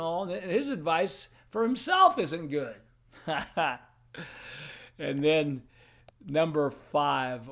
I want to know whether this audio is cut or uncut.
uncut